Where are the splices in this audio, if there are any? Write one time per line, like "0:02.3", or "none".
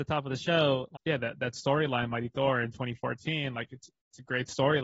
0:01.0